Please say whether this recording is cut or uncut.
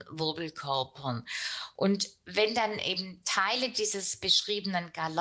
uncut